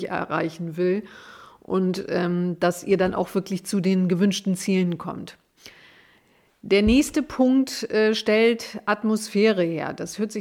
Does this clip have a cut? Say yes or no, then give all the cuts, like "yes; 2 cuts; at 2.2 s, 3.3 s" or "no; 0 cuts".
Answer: no; 0 cuts